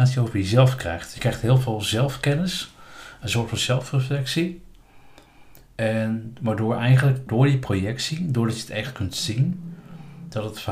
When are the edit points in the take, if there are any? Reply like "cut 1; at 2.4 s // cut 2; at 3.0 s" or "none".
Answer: cut 1; at 7.3 s